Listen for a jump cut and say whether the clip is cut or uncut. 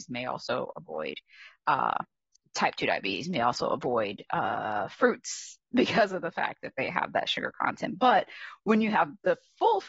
uncut